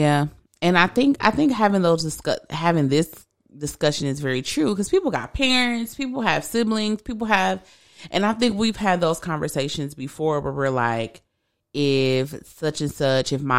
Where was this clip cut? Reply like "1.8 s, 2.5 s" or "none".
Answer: none